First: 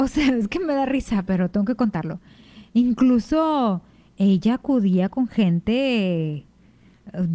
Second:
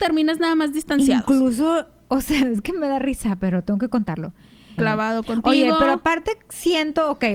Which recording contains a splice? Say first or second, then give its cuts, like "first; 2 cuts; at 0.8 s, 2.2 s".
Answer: second; 1 cut; at 4.8 s